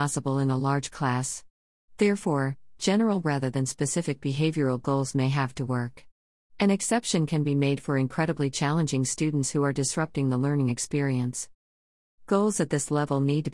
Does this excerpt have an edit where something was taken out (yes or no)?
no